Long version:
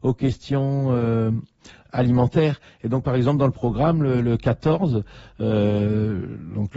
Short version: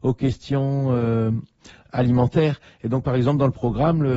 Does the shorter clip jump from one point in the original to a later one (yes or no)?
no